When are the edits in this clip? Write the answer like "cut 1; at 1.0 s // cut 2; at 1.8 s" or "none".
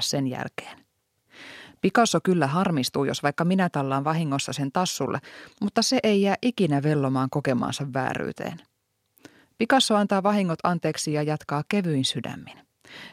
none